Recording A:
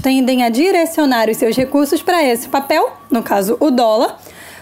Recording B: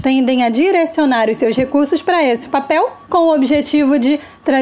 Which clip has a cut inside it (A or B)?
B